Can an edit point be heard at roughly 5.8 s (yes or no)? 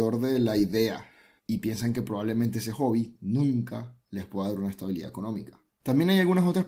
no